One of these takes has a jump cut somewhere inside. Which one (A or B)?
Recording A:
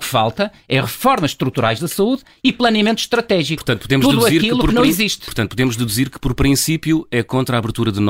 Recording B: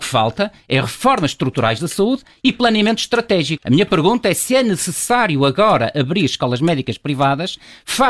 B